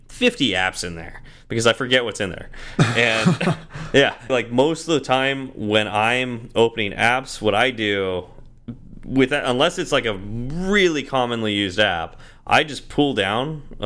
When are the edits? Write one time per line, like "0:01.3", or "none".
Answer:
0:04.3